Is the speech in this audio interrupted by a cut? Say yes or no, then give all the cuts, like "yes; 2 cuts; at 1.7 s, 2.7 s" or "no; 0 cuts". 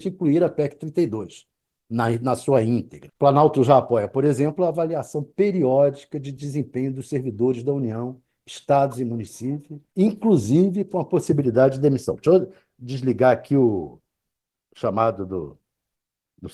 yes; 2 cuts; at 3.1 s, 9.9 s